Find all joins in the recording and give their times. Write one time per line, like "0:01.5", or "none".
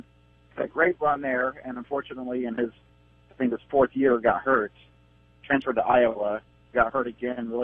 none